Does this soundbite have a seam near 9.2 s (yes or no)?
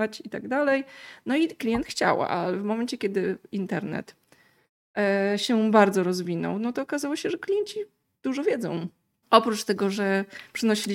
yes